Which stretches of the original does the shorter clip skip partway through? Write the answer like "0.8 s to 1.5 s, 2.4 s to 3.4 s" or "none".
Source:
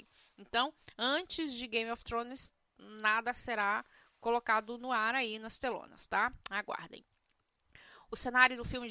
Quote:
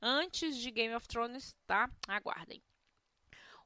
2.6 s to 6.1 s